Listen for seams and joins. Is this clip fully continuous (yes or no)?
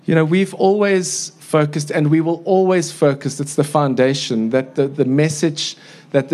yes